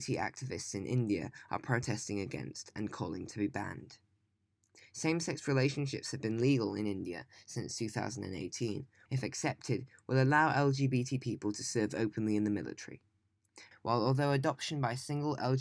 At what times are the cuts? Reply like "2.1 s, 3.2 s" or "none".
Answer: 9.1 s, 13.7 s